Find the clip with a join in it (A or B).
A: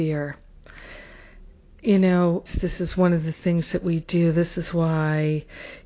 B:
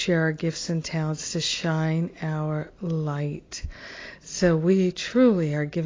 A